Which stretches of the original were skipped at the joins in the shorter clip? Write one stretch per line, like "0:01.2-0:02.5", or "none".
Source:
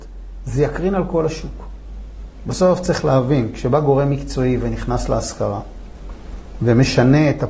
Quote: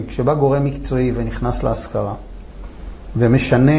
none